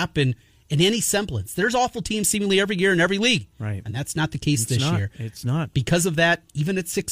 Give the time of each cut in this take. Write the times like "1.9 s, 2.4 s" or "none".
none